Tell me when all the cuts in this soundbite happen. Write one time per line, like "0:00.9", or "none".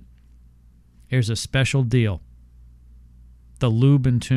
none